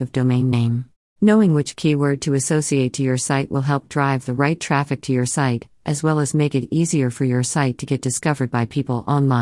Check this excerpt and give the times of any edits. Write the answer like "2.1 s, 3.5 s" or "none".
1.2 s